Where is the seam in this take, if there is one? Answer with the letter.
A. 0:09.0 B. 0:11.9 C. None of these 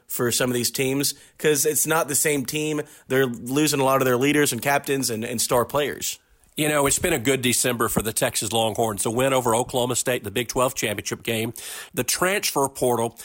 B